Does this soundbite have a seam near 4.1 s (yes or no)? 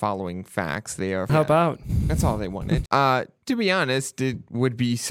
no